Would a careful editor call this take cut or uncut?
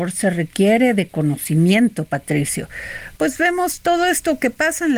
cut